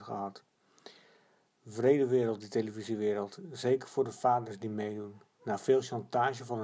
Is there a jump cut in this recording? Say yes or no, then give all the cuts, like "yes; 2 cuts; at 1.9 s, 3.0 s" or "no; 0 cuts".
no; 0 cuts